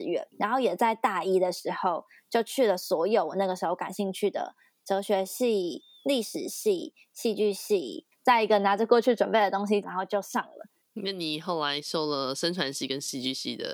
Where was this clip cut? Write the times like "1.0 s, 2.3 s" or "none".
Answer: 8.1 s, 9.8 s